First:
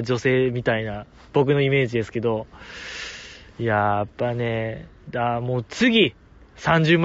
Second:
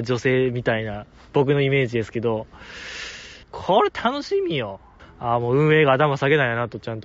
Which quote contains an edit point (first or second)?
second